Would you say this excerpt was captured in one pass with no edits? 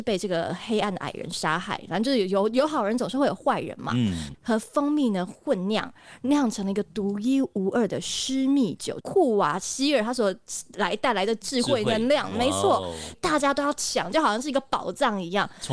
no; 3 cuts; at 4.3 s, 9.0 s, 13.1 s

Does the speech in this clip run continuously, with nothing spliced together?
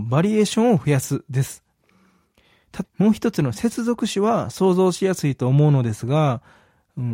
no; 1 cut; at 2.8 s

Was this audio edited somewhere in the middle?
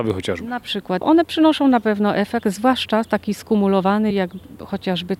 yes; 2 cuts; at 1.0 s, 4.1 s

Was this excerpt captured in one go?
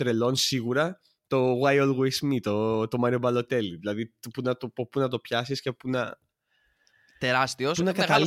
yes; 0 cuts

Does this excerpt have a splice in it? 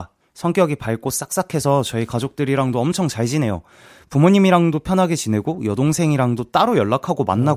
no; 0 cuts

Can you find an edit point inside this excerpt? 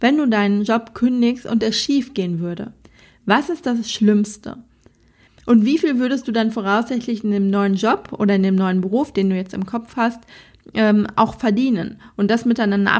yes; 1 cut; at 5.3 s

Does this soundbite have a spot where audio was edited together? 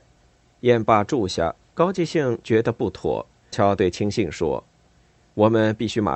yes; 1 cut; at 3.5 s

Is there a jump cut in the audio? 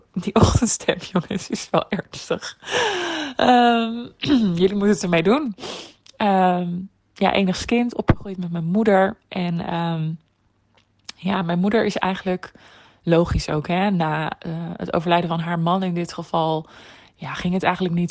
no; 0 cuts

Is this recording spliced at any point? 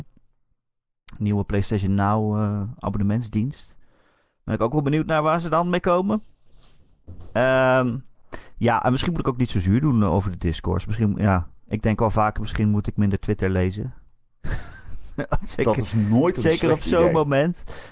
no; 0 cuts

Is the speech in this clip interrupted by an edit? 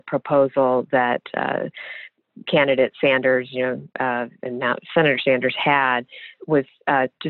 no; 0 cuts

